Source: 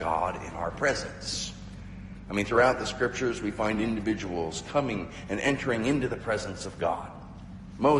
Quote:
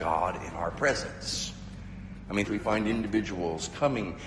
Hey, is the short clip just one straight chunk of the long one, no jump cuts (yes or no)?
no